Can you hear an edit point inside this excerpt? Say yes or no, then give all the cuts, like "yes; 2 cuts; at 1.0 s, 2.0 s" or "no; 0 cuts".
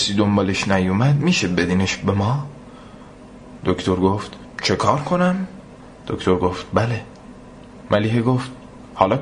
yes; 1 cut; at 6.0 s